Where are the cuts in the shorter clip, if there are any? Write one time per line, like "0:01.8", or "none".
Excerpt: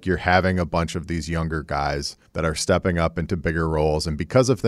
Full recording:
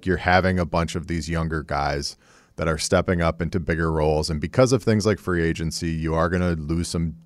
0:02.3